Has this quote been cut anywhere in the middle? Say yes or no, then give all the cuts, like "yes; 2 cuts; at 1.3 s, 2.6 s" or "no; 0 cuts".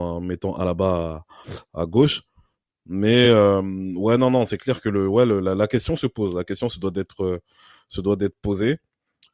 no; 0 cuts